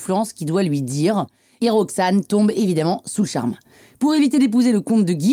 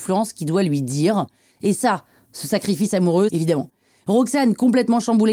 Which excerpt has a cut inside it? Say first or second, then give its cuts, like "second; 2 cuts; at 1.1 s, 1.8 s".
second; 2 cuts; at 1.5 s, 3.3 s